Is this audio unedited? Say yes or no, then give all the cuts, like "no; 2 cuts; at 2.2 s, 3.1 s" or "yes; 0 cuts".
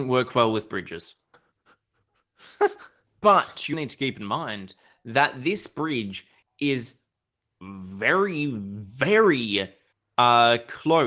no; 2 cuts; at 1.3 s, 3.7 s